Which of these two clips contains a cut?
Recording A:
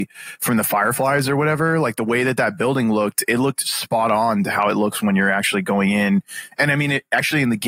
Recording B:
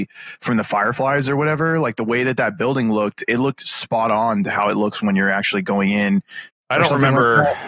B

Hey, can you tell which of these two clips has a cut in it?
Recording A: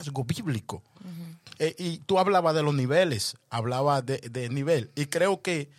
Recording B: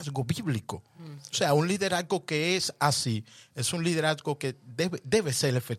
A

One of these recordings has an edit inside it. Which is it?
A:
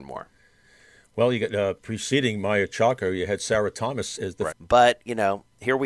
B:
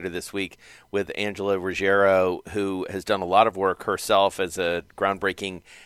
A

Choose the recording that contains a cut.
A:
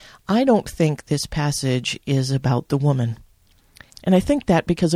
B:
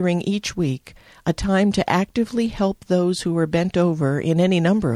A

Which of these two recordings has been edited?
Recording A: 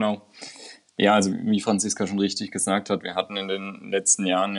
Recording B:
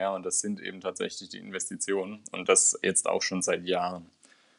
A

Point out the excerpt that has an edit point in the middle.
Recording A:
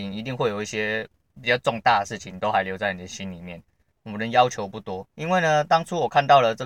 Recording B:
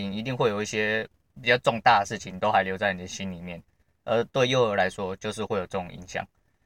A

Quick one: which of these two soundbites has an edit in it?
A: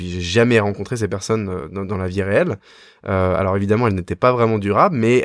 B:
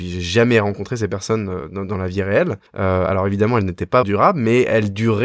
B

